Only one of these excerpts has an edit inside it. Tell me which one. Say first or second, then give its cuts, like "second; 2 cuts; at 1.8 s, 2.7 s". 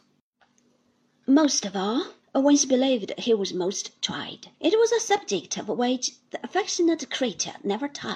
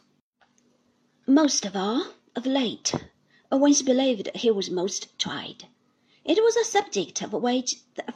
first; 2 cuts; at 2.2 s, 4.5 s